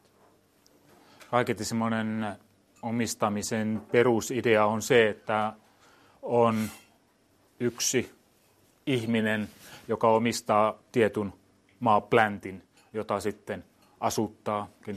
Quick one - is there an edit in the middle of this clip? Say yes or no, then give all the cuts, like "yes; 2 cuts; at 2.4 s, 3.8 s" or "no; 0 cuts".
no; 0 cuts